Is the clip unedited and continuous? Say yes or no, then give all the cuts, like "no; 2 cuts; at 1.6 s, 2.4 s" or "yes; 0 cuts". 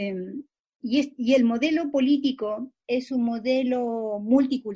no; 1 cut; at 2.8 s